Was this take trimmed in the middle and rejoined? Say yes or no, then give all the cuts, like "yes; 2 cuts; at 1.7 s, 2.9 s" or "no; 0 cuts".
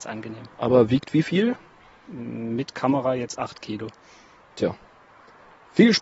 no; 0 cuts